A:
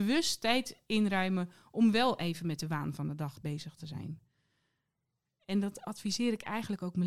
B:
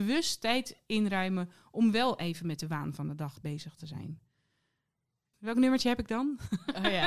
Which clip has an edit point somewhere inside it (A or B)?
B